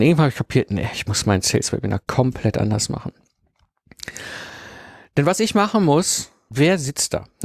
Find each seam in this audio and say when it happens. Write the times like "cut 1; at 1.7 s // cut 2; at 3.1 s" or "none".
cut 1; at 6.5 s

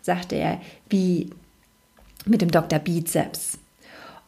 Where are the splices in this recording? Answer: none

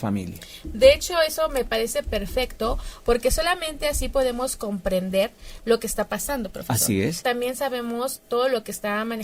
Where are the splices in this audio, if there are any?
cut 1; at 7.2 s

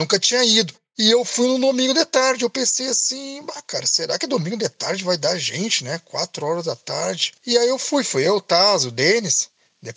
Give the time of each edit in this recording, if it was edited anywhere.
cut 1; at 7.4 s

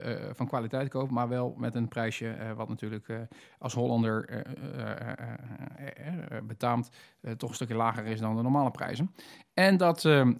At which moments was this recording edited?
none

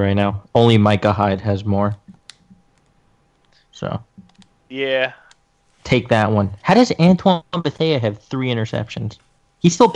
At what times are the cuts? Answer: none

